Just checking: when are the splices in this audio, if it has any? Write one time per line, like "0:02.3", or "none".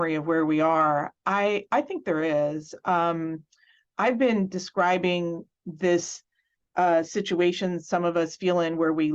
none